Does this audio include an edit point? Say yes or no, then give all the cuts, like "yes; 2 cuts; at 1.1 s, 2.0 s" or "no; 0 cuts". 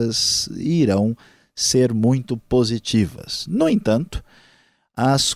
no; 0 cuts